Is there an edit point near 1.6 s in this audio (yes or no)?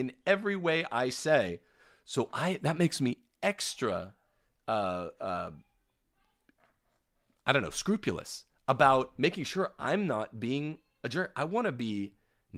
no